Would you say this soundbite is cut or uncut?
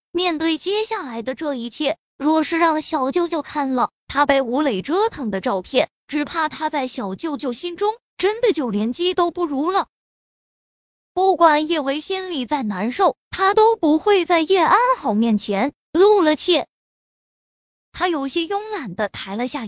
uncut